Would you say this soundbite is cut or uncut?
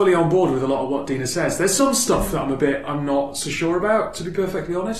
uncut